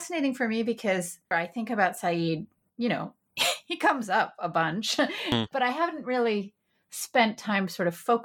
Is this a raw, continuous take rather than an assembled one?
no; 1 cut; at 1.3 s

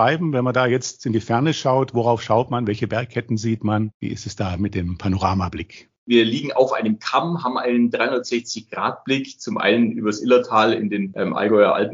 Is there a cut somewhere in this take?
no; 0 cuts

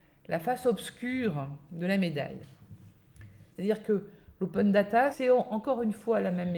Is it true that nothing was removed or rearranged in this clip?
no; 2 cuts; at 3.5 s, 5.1 s

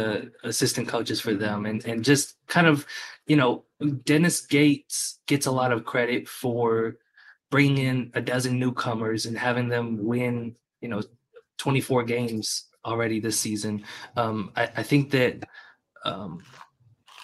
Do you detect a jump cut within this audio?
no; 0 cuts

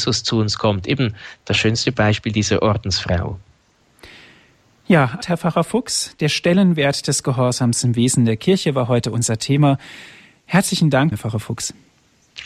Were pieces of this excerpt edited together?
yes; 2 cuts; at 5.2 s, 11.1 s

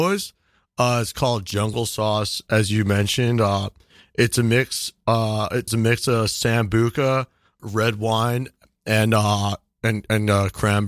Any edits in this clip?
yes; 2 cuts; at 5.7 s, 7.6 s

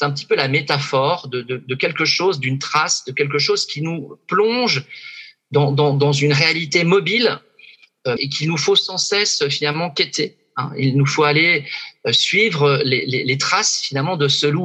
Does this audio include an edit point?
yes; 1 cut; at 8.2 s

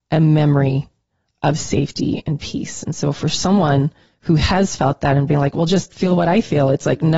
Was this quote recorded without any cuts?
yes; 0 cuts

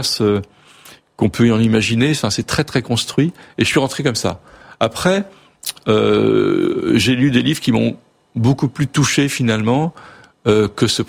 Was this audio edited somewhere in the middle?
no; 0 cuts

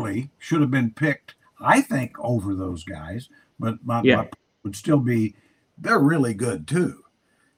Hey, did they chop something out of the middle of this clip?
no; 0 cuts

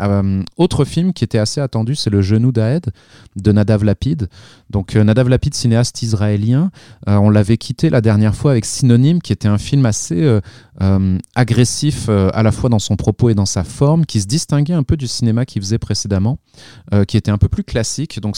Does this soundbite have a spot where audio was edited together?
no; 0 cuts

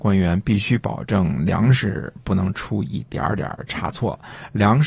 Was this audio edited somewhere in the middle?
no; 0 cuts

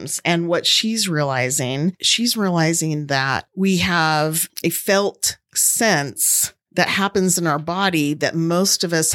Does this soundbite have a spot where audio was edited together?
yes; 1 cut; at 2.0 s

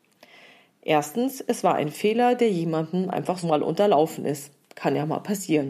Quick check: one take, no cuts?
no; 1 cut; at 3.4 s

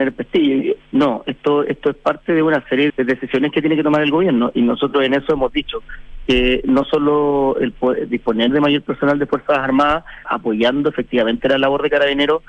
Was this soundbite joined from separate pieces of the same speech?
yes; 2 cuts; at 2.9 s, 10.2 s

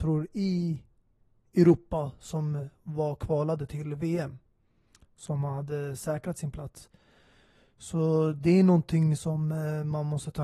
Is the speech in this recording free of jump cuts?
yes; 0 cuts

